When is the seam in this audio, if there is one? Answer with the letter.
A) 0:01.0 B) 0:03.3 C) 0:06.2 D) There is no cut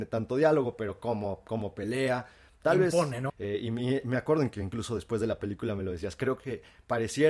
B